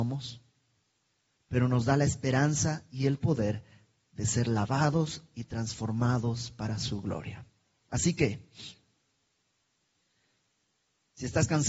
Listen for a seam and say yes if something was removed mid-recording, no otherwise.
no